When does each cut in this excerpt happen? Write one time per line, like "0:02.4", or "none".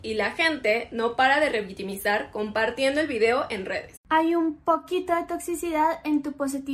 0:04.0